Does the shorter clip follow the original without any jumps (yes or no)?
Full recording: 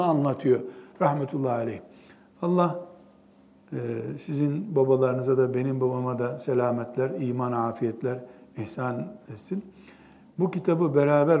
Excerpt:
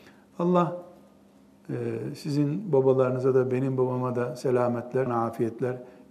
no